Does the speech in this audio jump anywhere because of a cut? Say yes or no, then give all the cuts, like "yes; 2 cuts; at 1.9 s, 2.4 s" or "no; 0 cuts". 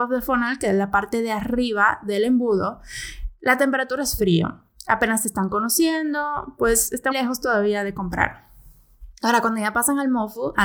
yes; 1 cut; at 7.1 s